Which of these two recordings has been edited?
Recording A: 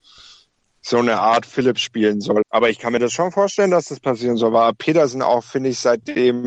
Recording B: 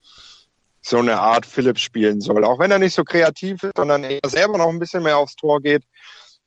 A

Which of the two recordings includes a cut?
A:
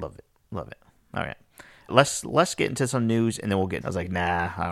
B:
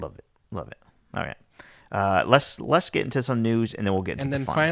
A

